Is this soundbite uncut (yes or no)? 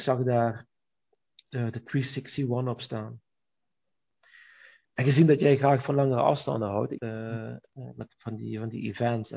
no